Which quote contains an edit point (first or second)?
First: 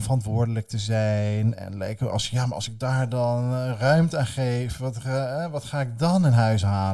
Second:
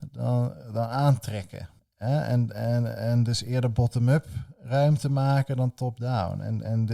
second